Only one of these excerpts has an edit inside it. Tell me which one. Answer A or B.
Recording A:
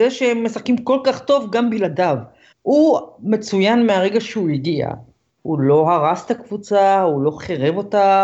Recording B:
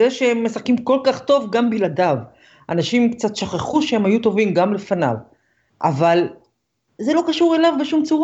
A